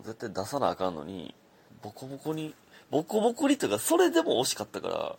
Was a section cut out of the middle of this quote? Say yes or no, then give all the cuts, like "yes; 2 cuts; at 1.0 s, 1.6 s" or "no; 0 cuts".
yes; 1 cut; at 1.7 s